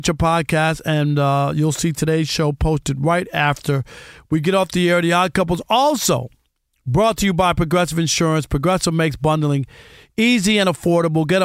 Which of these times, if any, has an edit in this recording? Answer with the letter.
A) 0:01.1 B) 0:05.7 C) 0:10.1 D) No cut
D